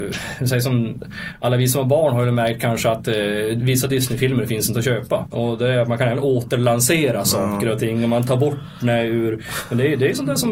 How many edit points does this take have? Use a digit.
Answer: 1